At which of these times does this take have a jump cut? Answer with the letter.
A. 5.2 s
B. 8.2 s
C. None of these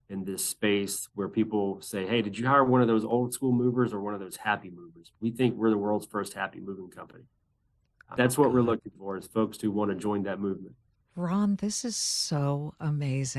B